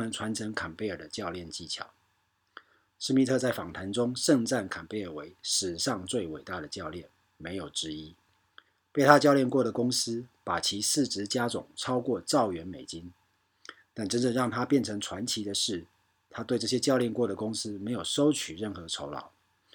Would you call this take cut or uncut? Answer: uncut